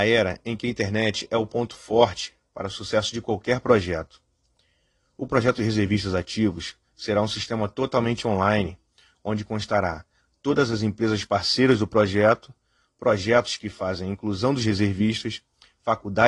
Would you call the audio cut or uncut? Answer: uncut